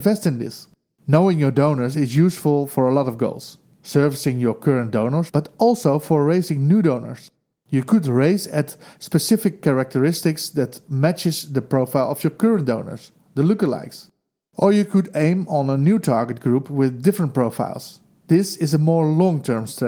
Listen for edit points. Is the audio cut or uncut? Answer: cut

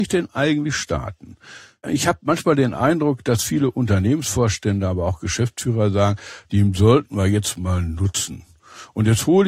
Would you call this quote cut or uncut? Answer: cut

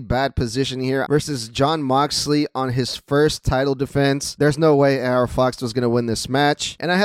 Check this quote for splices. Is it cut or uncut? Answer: cut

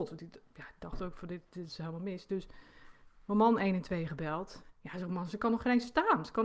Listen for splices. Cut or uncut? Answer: cut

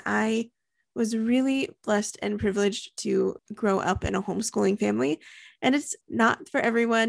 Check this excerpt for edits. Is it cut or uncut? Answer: cut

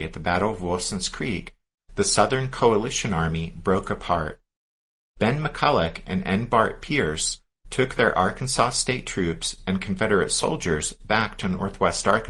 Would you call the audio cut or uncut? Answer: uncut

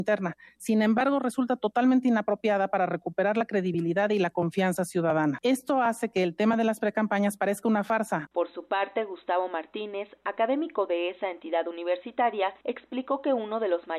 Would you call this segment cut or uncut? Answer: cut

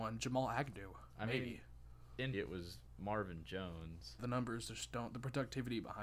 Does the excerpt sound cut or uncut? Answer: cut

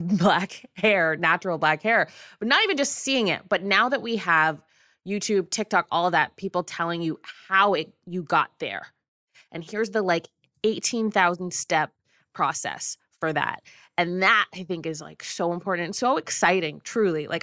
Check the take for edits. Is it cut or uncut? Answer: uncut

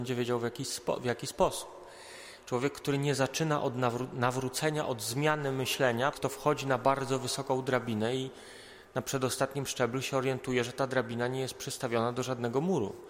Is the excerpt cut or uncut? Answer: cut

